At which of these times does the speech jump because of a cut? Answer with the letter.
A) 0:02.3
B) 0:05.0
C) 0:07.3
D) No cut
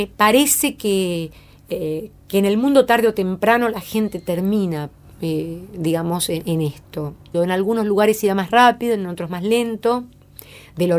C